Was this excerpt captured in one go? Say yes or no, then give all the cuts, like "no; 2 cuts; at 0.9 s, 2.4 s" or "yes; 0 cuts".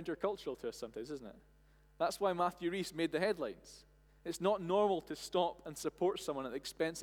yes; 0 cuts